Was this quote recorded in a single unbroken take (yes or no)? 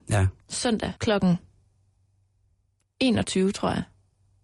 no